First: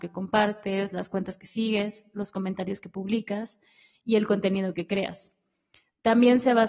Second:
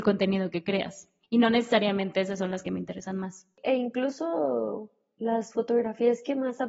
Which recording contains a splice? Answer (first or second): second